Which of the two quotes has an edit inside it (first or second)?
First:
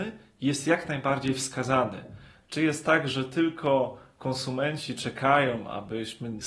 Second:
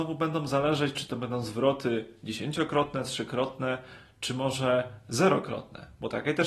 first